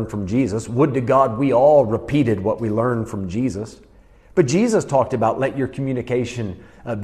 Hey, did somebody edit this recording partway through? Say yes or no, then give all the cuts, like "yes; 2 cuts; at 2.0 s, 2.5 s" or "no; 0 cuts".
no; 0 cuts